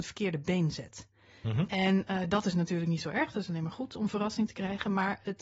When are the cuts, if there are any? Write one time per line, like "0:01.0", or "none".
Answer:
none